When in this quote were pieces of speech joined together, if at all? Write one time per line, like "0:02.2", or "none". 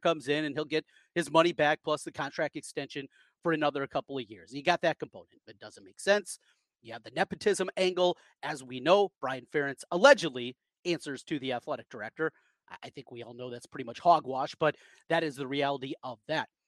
none